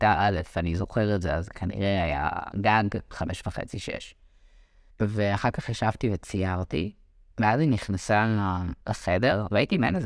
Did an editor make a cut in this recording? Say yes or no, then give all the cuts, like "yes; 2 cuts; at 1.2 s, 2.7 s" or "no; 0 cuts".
yes; 3 cuts; at 4.9 s, 7.3 s, 8.8 s